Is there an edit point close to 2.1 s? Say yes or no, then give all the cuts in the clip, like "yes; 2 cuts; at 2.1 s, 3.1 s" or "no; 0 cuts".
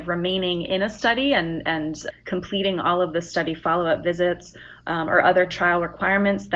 yes; 1 cut; at 2.1 s